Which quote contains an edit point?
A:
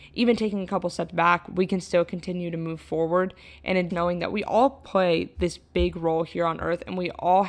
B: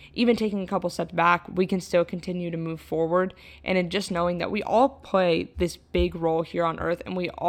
A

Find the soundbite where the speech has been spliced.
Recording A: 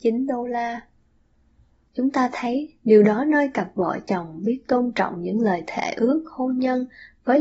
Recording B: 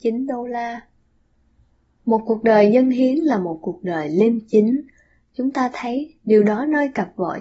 A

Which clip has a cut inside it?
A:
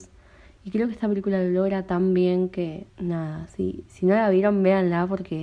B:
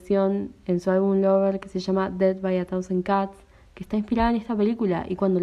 A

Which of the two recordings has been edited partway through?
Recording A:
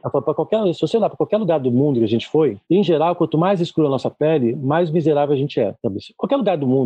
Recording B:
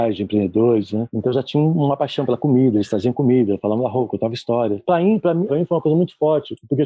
B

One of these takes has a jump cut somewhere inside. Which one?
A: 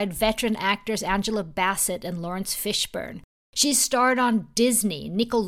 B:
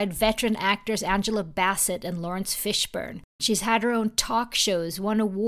B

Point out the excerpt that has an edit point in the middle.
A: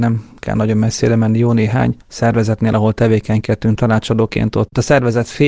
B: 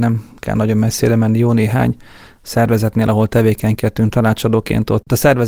A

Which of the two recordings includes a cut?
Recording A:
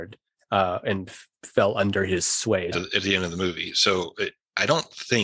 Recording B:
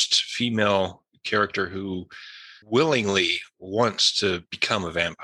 A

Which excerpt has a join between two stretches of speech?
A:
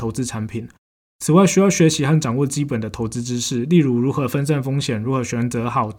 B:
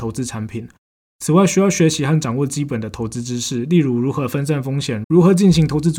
B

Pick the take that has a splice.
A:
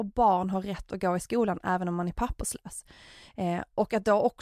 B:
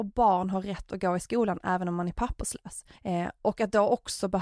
B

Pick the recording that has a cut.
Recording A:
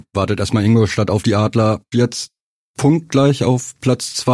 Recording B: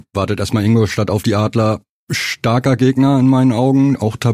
A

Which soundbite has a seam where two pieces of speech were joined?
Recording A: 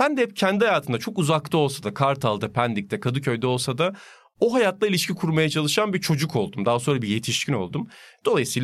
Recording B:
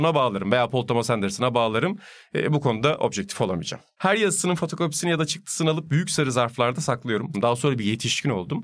B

